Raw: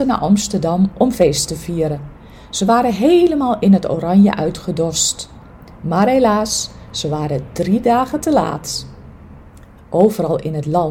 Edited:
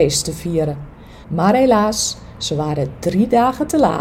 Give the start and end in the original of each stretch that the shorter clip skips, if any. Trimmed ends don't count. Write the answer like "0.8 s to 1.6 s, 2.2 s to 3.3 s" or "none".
2.5 s to 5.8 s